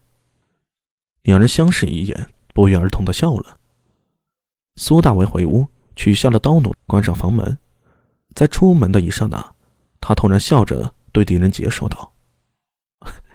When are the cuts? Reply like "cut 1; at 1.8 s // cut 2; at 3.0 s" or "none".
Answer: cut 1; at 6.7 s